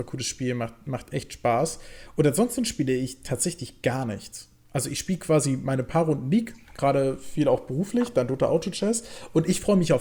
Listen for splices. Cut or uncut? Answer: uncut